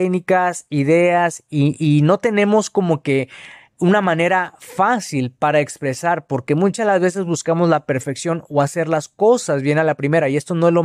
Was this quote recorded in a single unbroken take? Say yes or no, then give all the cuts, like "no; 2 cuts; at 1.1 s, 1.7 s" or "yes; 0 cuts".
yes; 0 cuts